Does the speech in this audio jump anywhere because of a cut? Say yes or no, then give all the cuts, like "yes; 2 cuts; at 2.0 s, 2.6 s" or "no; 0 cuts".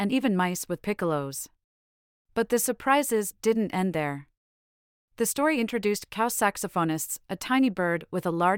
yes; 1 cut; at 2.1 s